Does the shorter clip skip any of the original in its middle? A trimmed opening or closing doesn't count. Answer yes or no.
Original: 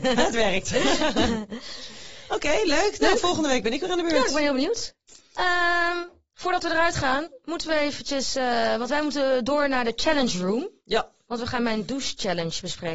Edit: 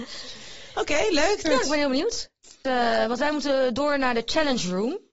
yes